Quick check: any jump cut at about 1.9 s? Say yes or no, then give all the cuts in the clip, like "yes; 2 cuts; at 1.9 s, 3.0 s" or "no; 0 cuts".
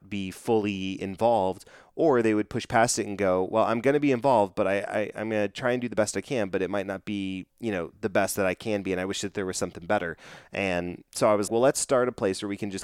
no; 2 cuts; at 7.5 s, 11.5 s